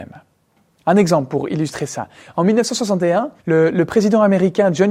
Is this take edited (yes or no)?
yes